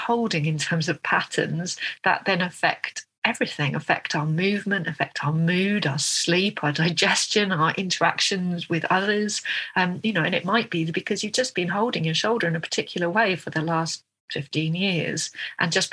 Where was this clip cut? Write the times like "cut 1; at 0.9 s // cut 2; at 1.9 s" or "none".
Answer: none